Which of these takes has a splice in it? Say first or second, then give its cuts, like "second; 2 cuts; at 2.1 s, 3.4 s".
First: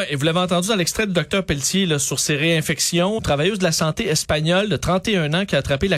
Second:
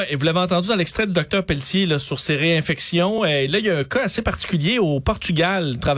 first; 1 cut; at 3.2 s